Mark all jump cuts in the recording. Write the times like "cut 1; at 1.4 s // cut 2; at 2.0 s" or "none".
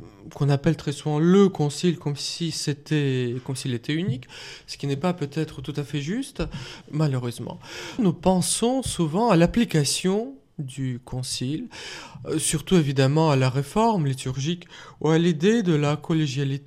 cut 1; at 6.8 s // cut 2; at 8.0 s